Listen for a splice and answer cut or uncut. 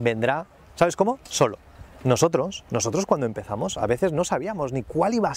uncut